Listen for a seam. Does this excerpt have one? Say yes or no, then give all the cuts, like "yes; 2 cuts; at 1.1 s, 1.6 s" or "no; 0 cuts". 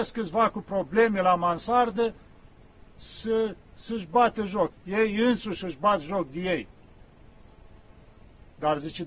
yes; 1 cut; at 4.7 s